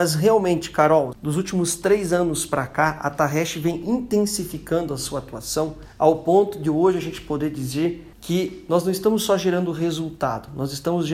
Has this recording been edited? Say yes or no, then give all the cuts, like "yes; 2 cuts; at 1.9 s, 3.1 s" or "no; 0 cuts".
yes; 1 cut; at 1.1 s